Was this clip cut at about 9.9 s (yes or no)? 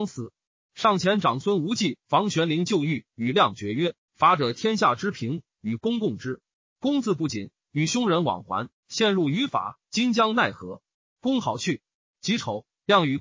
no